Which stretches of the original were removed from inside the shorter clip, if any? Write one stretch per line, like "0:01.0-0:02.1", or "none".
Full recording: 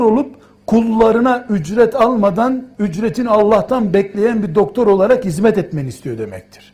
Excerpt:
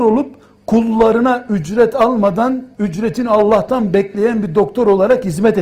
none